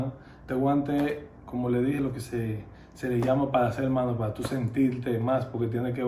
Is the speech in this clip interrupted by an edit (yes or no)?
no